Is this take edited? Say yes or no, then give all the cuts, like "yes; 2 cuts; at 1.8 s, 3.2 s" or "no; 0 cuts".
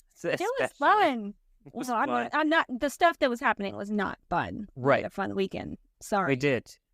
no; 0 cuts